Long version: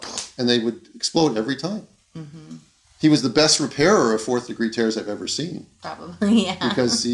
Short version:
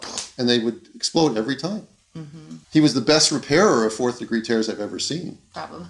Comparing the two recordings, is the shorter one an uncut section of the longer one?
no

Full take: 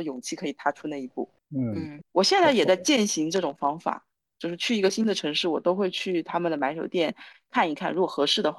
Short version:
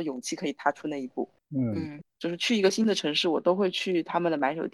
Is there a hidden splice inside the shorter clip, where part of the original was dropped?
yes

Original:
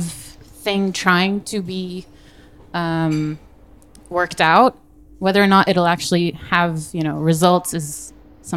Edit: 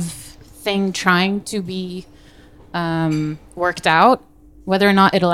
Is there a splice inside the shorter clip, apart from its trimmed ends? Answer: yes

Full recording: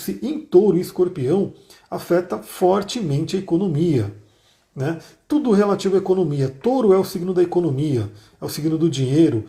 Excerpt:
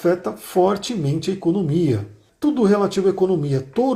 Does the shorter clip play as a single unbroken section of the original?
no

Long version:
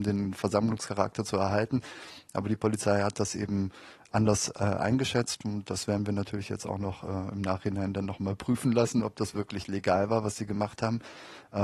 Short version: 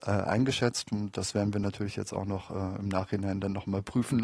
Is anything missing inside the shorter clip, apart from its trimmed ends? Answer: no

